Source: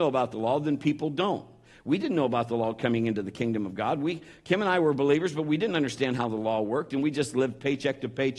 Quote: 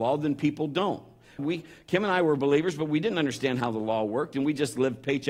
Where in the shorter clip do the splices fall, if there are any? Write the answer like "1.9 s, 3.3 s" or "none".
1.4 s